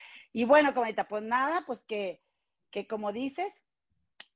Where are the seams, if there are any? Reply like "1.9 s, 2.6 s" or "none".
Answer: none

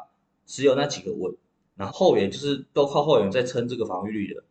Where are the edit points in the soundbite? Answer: 1.9 s

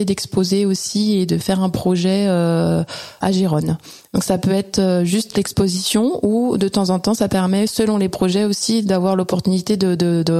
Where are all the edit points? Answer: 3.2 s

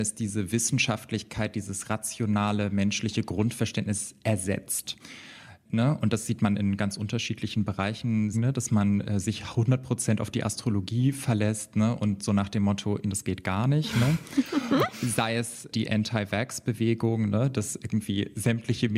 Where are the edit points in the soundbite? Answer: 8.3 s, 13.0 s

